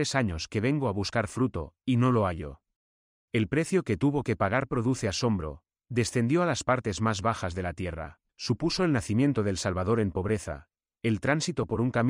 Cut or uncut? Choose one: cut